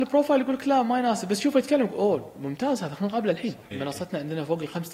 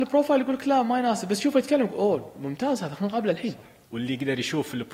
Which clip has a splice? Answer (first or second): first